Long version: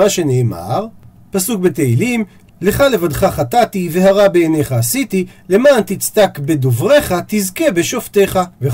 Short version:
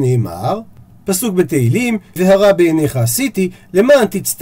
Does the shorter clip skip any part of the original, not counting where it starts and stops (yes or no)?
yes